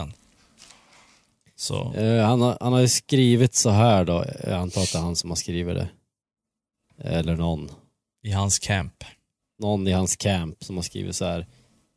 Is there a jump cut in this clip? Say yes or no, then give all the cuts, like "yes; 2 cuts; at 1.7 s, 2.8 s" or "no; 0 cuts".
no; 0 cuts